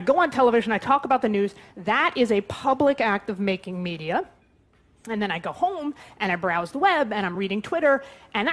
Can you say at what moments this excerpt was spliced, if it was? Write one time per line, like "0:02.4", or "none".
none